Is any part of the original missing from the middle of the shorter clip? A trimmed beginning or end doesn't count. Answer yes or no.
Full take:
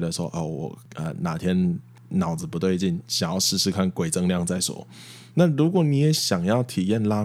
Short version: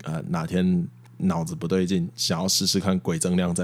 no